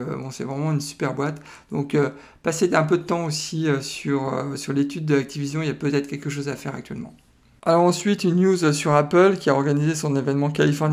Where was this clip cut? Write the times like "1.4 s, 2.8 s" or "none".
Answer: none